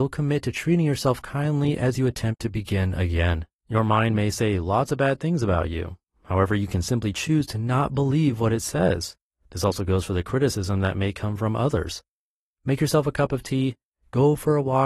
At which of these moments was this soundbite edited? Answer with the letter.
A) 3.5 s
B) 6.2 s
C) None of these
A